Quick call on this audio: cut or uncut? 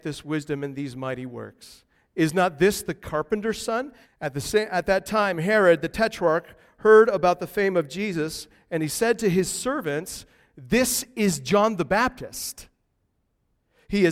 cut